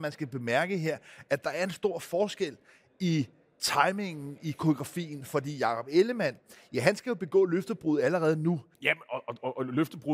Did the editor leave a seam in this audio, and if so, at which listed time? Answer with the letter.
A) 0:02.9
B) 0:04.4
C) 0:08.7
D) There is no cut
C